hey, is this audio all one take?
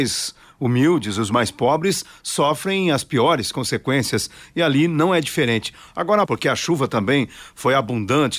no; 1 cut; at 6.2 s

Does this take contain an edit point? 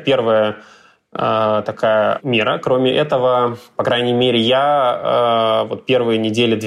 no; 0 cuts

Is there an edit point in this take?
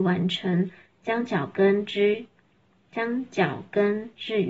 yes; 1 cut; at 0.9 s

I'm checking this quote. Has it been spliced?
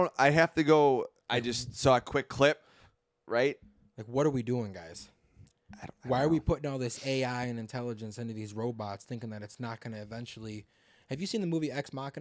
yes; 1 cut; at 1.2 s

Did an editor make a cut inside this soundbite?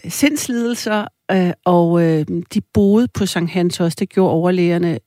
no; 0 cuts

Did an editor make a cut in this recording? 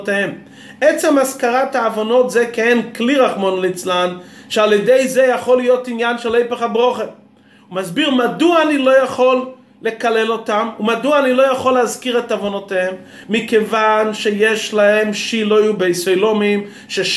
no; 0 cuts

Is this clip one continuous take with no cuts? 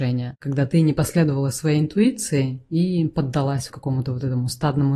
no; 1 cut; at 3.7 s

